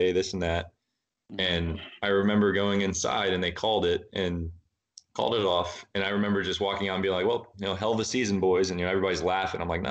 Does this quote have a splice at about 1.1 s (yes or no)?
no